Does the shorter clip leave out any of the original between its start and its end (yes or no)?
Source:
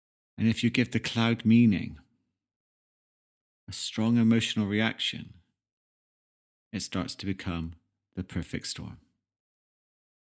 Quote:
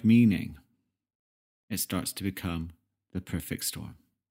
yes